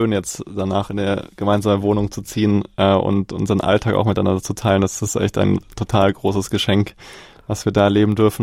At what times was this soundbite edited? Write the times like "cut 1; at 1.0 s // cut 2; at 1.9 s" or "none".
none

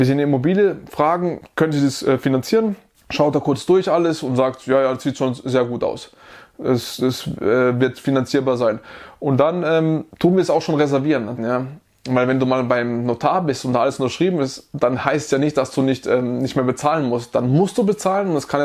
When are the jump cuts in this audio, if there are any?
cut 1; at 11.4 s

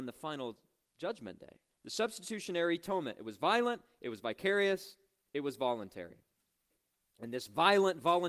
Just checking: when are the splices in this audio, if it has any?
cut 1; at 1.7 s

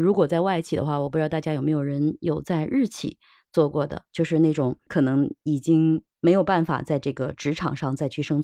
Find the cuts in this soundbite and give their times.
cut 1; at 4.9 s

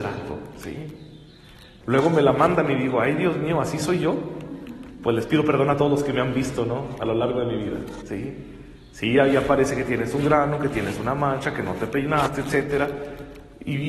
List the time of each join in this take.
cut 1; at 1.8 s

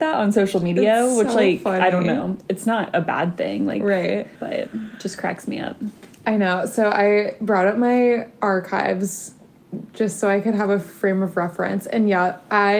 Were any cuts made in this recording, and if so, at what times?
cut 1; at 4.3 s

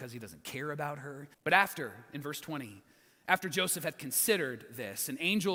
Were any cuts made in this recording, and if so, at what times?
cut 1; at 1.3 s

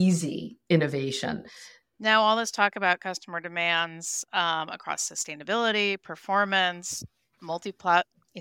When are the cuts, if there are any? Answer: cut 1; at 1.8 s // cut 2; at 7.4 s

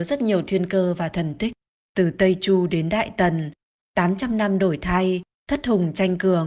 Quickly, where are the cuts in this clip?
cut 1; at 1.8 s // cut 2; at 5.4 s

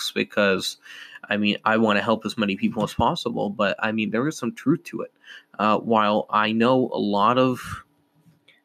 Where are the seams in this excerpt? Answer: none

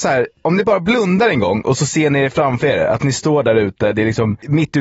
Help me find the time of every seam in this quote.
none

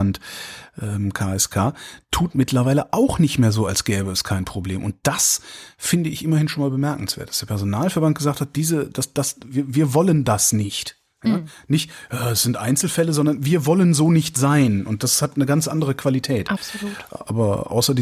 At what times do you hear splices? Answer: none

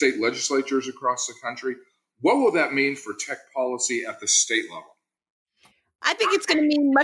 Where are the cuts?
none

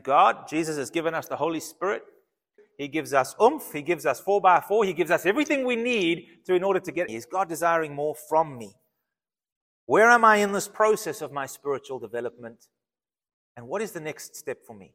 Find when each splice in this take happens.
cut 1; at 2.6 s // cut 2; at 7.1 s

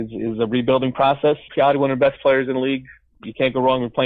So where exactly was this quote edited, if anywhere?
cut 1; at 1.5 s

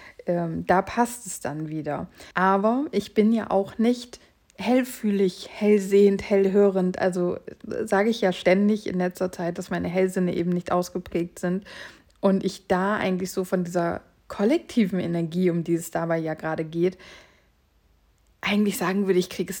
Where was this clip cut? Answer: cut 1; at 2.3 s

